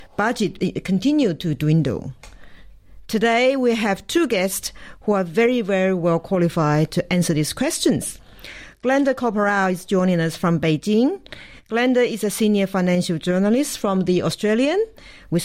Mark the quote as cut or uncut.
uncut